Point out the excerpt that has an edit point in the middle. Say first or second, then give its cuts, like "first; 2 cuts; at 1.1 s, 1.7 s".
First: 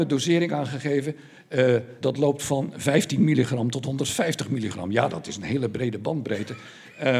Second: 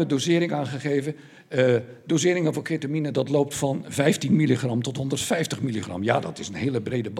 first; 1 cut; at 2.0 s